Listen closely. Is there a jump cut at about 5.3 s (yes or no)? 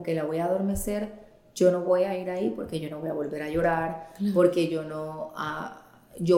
no